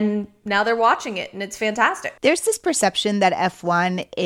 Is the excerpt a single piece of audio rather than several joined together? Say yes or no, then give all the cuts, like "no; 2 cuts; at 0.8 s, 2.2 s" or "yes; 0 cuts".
no; 1 cut; at 2.2 s